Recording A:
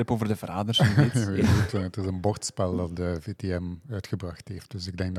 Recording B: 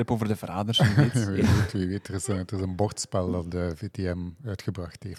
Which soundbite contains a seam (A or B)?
A